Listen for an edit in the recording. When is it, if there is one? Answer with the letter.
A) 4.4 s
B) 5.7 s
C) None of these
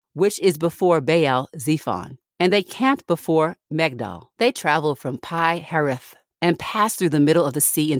C